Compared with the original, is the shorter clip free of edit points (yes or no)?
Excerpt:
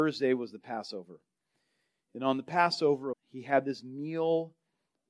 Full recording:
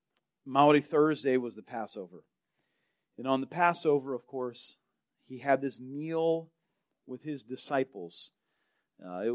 no